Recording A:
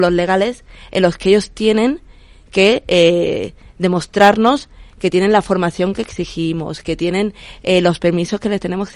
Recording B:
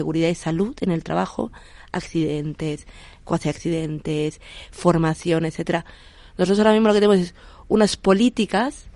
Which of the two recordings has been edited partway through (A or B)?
B